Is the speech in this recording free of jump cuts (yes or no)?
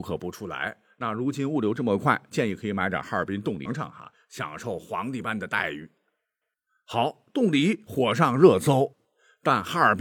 no